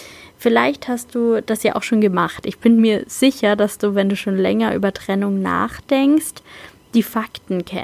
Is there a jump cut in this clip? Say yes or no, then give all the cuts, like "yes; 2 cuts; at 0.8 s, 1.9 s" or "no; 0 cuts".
no; 0 cuts